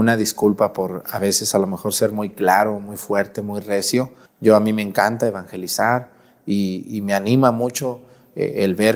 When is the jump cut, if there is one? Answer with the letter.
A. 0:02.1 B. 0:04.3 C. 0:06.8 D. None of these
B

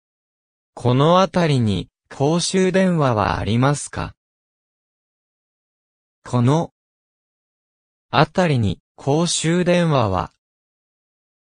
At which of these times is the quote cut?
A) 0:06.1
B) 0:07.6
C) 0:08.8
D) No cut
C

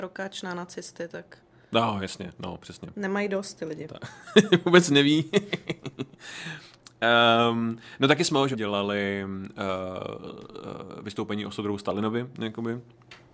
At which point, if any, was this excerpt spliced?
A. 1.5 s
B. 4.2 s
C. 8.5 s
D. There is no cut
C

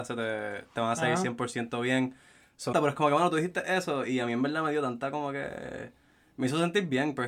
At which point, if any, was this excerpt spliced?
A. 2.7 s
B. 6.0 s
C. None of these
A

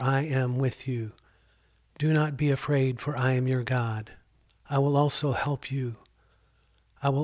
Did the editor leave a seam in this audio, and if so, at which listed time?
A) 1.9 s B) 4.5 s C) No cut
B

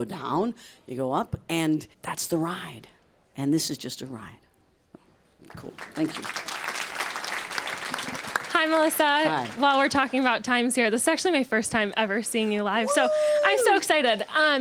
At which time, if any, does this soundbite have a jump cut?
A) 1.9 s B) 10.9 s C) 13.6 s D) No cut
A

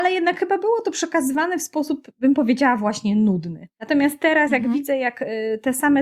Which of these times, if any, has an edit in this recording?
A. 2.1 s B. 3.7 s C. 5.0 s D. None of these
B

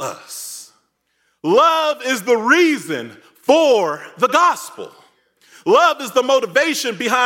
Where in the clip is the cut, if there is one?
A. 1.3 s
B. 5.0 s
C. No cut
C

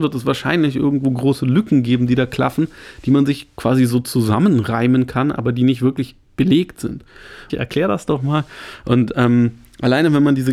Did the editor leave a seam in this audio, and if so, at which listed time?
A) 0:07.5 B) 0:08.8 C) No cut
A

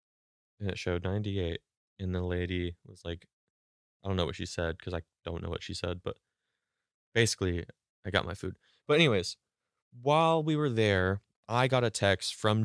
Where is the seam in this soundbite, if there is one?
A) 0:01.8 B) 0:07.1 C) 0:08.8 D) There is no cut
D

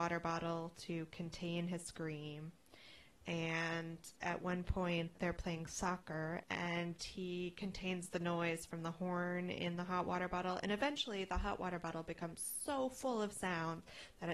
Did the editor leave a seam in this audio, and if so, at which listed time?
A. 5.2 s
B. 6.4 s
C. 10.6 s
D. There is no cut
B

